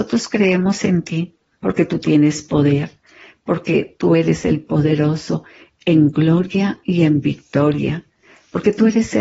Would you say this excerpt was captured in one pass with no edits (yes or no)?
yes